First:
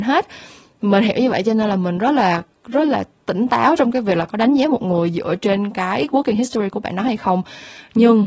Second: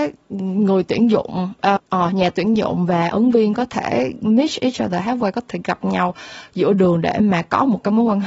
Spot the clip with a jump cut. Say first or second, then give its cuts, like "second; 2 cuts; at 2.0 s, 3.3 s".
second; 1 cut; at 1.8 s